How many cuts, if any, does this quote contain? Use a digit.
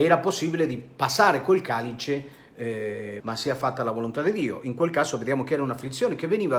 1